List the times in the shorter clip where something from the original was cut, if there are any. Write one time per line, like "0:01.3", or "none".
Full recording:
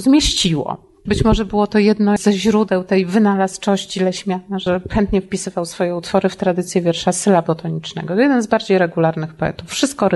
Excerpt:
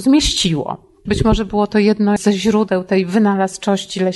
none